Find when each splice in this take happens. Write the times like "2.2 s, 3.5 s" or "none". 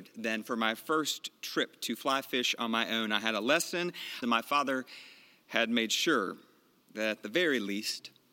4.2 s